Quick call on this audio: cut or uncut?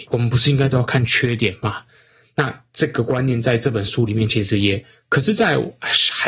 cut